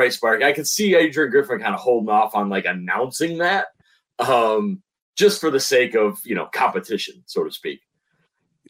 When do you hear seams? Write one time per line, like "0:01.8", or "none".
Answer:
none